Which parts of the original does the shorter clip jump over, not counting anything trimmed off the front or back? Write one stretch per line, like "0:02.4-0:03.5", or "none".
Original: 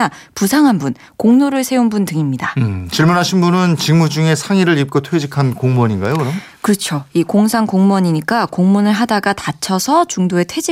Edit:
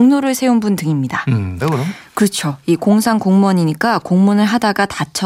0:02.9-0:06.1

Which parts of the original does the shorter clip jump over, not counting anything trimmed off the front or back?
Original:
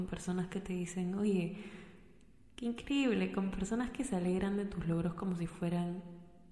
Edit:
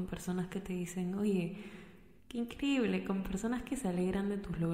0:02.2-0:02.5

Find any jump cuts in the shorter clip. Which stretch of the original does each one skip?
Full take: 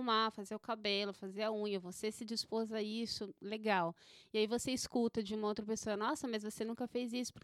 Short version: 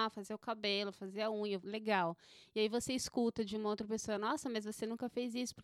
0:01.8-0:03.4

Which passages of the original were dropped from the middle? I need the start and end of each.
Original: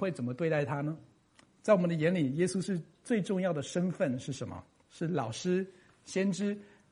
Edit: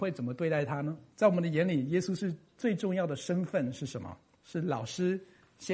0:01.1-0:01.6

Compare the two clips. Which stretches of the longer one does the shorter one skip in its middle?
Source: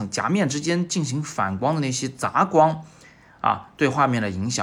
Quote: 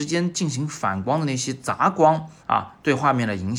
0:02.9-0:03.3

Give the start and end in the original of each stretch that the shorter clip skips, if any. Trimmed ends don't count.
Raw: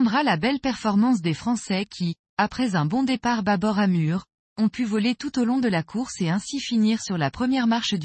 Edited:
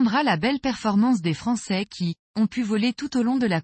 0:02.2-0:04.4

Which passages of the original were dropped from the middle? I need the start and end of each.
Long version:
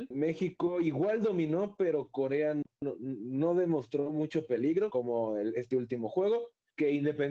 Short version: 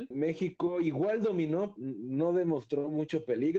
0:01.8-0:03.0

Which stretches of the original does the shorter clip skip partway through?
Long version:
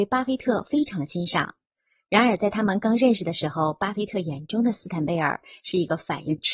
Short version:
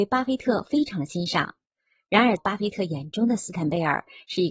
0:02.4-0:03.7

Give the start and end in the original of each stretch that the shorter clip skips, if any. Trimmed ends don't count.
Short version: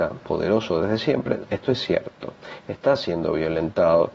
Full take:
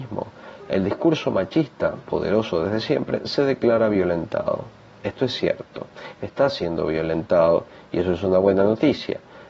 0:03.2-0:04.9

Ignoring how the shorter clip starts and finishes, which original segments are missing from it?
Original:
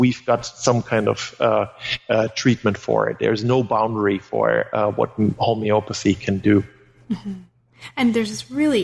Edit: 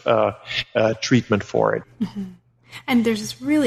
0:03.2-0:06.9

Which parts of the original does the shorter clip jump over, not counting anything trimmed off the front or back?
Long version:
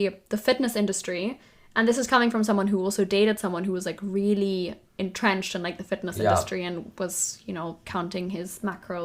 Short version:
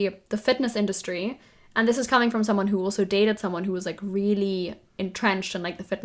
none

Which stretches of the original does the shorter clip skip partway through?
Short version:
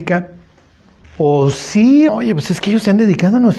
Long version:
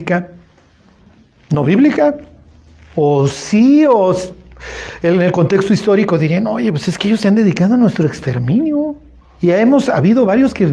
0:01.0-0:02.8
0:03.9-0:06.5

